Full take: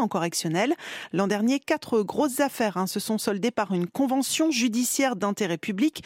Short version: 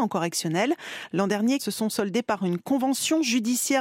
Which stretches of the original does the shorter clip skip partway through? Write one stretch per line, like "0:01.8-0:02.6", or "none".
0:01.6-0:02.9